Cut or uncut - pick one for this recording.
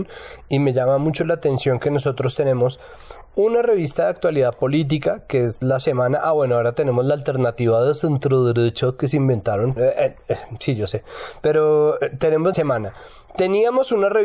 cut